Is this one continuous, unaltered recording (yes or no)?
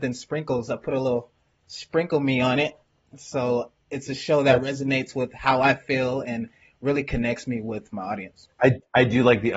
yes